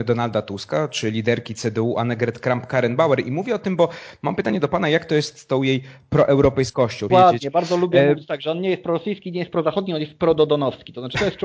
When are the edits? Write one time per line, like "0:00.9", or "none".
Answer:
0:07.1